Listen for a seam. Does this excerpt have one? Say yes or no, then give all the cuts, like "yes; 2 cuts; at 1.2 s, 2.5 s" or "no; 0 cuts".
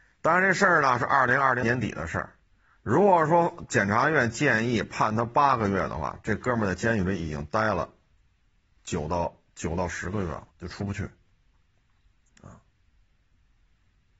yes; 2 cuts; at 1.6 s, 10.5 s